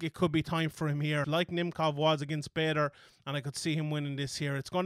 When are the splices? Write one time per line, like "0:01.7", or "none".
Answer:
0:01.2